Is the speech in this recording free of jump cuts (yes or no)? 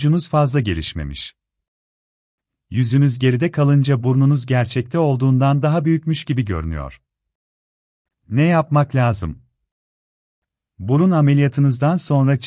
no